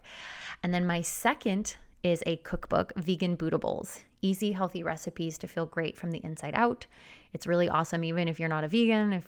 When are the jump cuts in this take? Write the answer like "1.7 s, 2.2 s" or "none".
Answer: none